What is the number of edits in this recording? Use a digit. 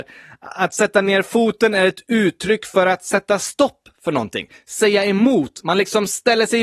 0